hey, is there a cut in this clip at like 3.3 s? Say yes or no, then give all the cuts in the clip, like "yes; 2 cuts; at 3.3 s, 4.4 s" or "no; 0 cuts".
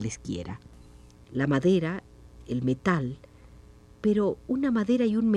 no; 1 cut; at 1.1 s